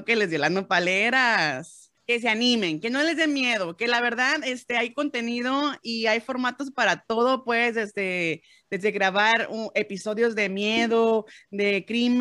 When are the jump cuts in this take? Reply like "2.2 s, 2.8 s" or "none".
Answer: 2.0 s